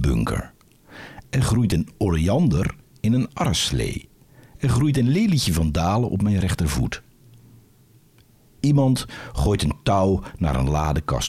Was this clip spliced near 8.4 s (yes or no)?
no